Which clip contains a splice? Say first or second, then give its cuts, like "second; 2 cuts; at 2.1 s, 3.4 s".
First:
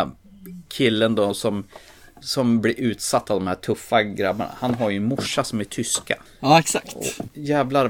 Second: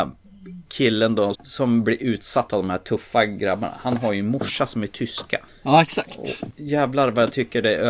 second; 1 cut; at 1.3 s